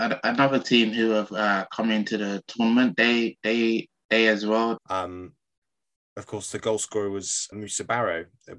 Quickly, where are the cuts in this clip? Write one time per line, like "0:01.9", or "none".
0:04.8
0:07.5